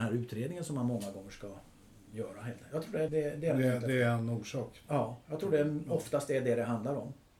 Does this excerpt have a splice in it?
yes; 1 cut; at 3.1 s

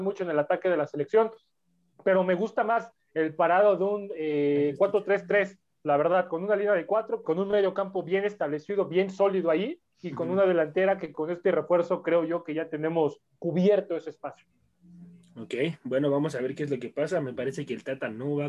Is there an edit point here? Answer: yes; 1 cut; at 7.2 s

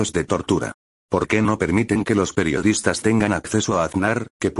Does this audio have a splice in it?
no; 0 cuts

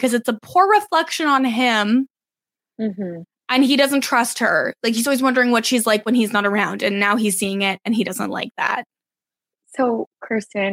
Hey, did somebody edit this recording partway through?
no; 0 cuts

